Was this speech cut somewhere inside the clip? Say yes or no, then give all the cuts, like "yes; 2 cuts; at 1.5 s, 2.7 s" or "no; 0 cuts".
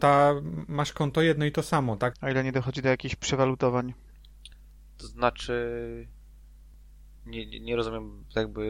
yes; 1 cut; at 2.1 s